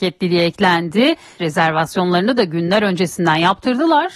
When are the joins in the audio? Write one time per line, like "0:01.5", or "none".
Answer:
0:01.4